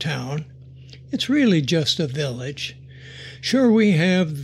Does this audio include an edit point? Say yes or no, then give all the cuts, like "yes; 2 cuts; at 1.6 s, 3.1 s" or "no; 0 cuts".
no; 0 cuts